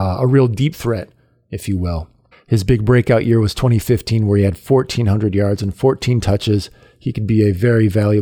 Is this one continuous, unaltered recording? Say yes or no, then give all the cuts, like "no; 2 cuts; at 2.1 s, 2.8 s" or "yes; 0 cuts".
no; 1 cut; at 2.3 s